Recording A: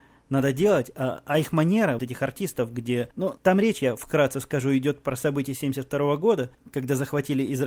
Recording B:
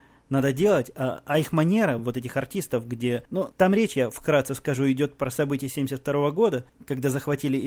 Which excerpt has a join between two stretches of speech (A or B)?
A